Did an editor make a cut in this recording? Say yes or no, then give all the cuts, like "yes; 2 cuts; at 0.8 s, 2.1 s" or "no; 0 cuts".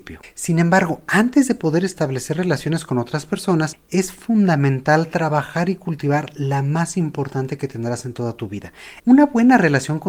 yes; 1 cut; at 9.0 s